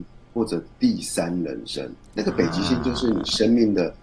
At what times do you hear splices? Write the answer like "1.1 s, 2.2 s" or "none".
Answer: 2.1 s